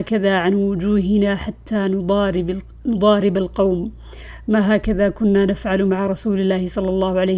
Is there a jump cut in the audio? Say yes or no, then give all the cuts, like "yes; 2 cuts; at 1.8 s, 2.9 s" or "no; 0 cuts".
no; 0 cuts